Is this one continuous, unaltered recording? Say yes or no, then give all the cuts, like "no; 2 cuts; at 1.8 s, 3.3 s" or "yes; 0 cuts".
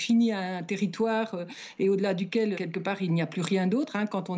no; 1 cut; at 2.5 s